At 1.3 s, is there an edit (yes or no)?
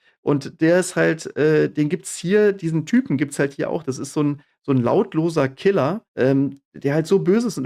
no